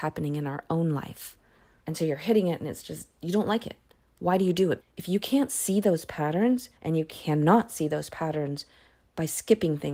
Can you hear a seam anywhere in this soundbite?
yes; 3 cuts; at 1.8 s, 4.8 s, 6.8 s

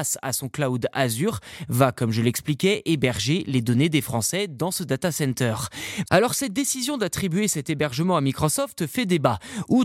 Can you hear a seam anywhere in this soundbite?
yes; 1 cut; at 6.0 s

